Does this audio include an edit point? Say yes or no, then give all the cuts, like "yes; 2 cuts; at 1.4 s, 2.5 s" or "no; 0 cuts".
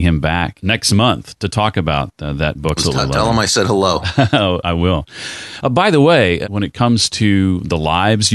yes; 1 cut; at 2.8 s